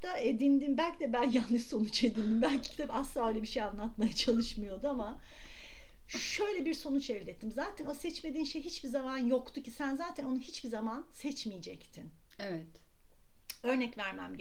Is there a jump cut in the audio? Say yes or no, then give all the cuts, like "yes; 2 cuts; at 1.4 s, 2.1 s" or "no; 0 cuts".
no; 0 cuts